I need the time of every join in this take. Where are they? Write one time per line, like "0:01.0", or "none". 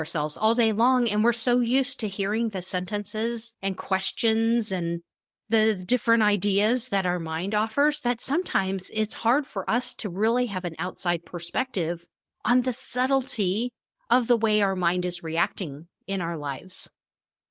none